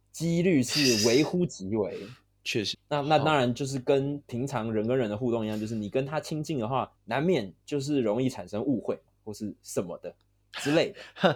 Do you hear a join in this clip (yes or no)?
yes